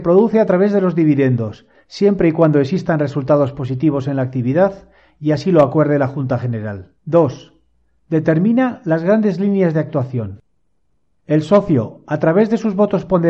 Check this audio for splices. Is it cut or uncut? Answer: cut